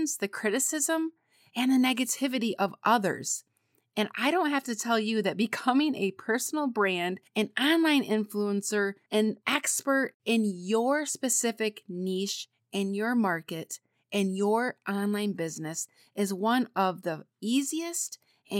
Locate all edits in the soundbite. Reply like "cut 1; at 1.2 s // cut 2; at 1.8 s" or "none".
none